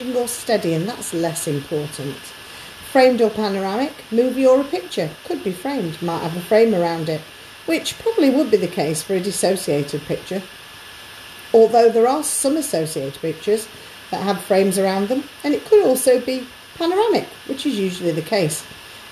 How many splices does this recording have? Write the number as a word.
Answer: zero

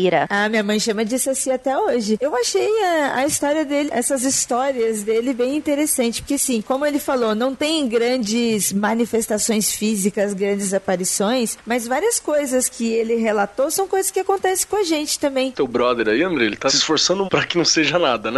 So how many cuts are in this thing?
three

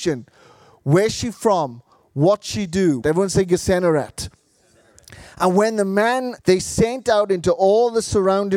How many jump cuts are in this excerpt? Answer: two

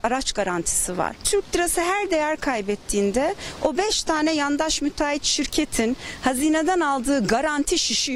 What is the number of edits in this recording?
zero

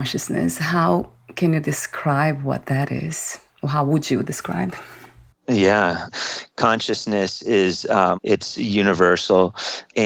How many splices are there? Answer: two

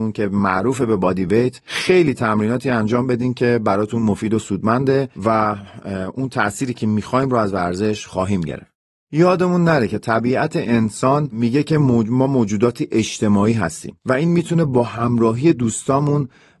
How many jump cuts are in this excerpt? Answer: zero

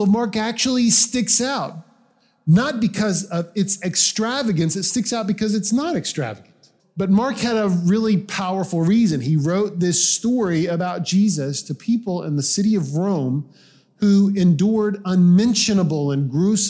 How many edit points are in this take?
one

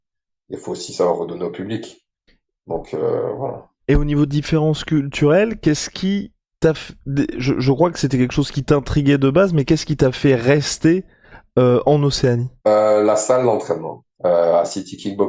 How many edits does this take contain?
two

